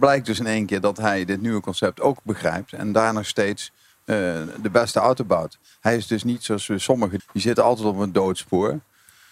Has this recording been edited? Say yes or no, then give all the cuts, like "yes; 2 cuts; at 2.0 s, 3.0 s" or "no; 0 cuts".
yes; 1 cut; at 7.2 s